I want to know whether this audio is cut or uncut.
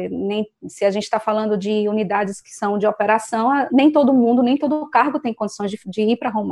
cut